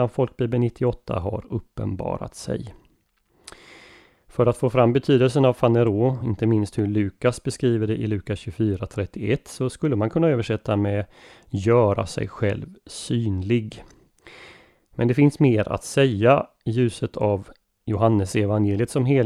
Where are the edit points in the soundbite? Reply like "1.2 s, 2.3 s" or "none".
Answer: none